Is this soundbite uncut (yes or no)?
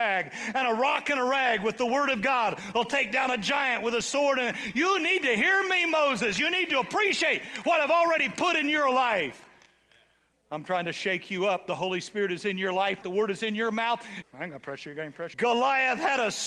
no